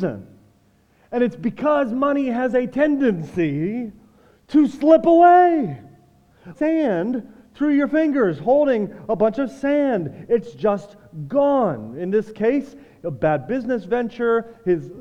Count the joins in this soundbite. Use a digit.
1